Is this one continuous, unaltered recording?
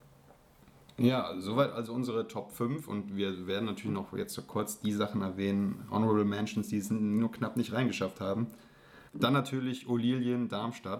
no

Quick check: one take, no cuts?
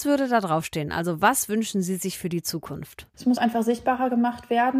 yes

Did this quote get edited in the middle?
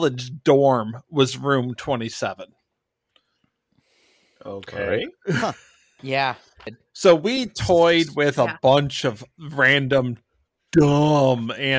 yes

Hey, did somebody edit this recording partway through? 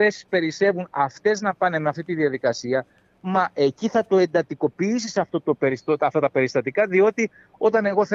no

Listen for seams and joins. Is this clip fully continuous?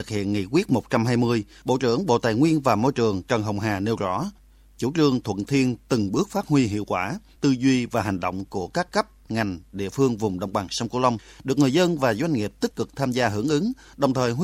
no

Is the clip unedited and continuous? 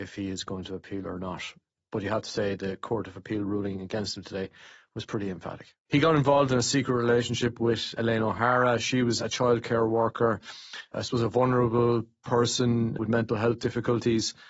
no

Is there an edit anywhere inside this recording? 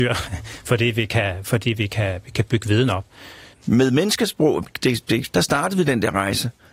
yes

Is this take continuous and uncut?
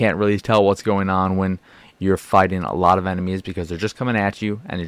yes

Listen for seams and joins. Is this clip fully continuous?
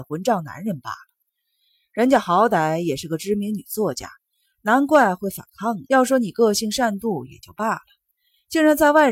no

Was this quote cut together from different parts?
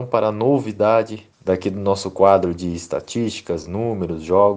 no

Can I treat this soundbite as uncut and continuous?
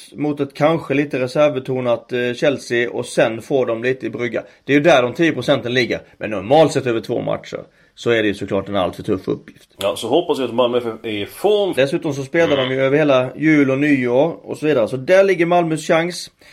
no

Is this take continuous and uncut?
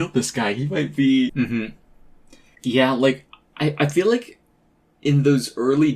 no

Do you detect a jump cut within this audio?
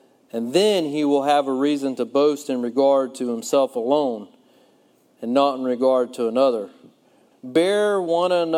yes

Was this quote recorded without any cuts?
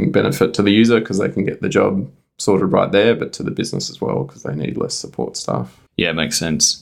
no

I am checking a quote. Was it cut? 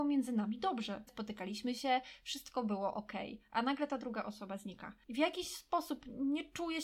yes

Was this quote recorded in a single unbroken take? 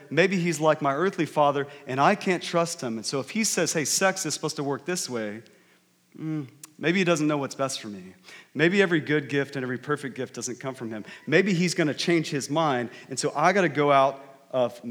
yes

